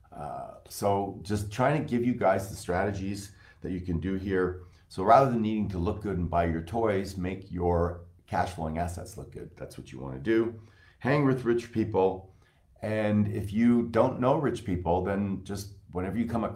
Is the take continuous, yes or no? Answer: yes